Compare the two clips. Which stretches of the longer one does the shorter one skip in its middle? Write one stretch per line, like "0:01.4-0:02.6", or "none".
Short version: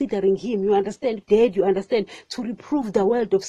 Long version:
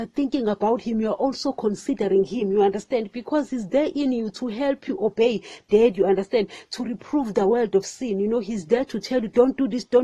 0:03.1-0:05.6